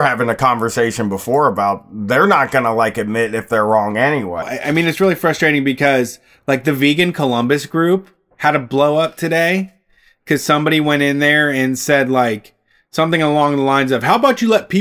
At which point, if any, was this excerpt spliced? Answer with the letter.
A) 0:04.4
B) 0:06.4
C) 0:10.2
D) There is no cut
A